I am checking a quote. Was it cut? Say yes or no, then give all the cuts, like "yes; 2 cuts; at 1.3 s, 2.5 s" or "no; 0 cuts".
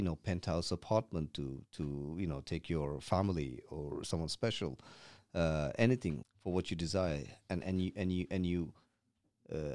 yes; 1 cut; at 6.2 s